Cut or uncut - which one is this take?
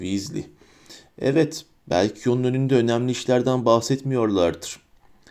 uncut